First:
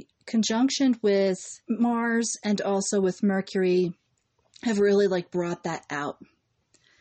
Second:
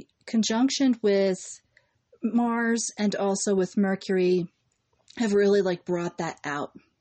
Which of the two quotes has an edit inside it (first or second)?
first